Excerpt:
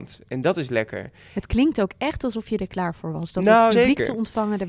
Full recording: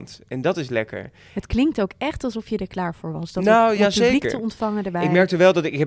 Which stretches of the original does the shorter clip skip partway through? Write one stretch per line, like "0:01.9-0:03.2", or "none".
0:03.7-0:04.0